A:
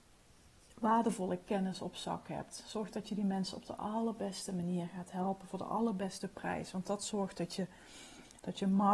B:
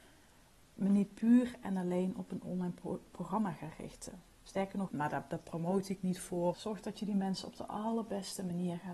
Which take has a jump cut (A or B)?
B